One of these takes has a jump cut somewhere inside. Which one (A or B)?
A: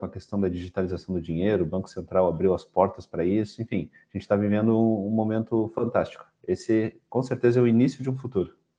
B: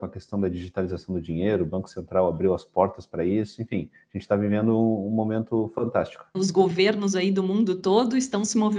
B